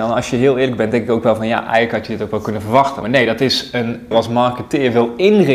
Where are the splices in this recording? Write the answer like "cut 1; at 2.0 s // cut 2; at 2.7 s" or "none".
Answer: cut 1; at 3.0 s // cut 2; at 4.1 s

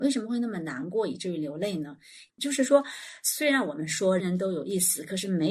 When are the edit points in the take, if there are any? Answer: cut 1; at 2.3 s // cut 2; at 4.2 s

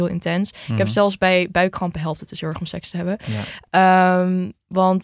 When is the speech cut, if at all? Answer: cut 1; at 3.7 s

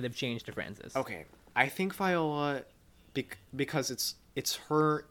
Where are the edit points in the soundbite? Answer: none

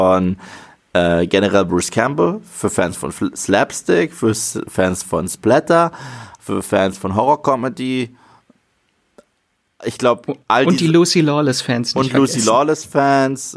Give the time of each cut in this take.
none

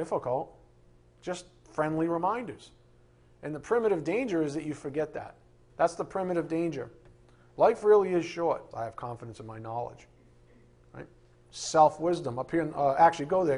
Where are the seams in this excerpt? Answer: cut 1; at 5.7 s // cut 2; at 8.7 s

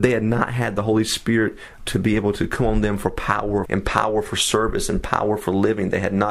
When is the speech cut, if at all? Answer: cut 1; at 1.8 s // cut 2; at 3.7 s

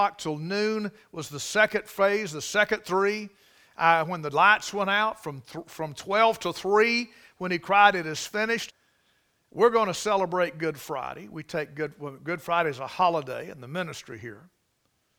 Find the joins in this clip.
cut 1; at 8.7 s

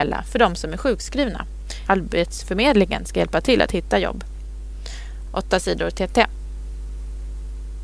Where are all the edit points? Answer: cut 1; at 1.9 s // cut 2; at 5.3 s

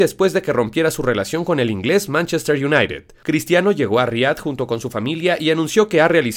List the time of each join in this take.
none

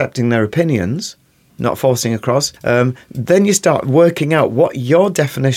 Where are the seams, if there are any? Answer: cut 1; at 2.6 s

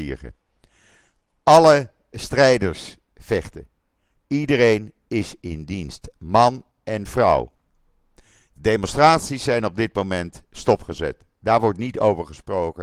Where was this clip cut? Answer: cut 1; at 2.1 s

